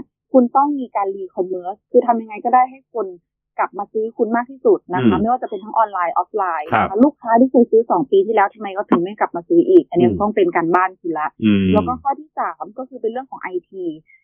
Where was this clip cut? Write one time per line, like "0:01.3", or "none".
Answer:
none